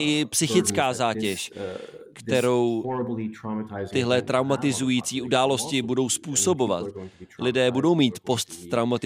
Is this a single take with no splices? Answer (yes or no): yes